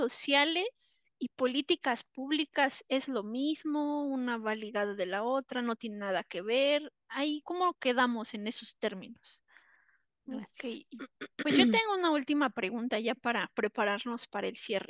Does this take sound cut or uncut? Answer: cut